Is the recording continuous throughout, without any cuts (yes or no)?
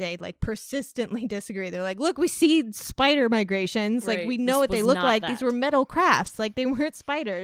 yes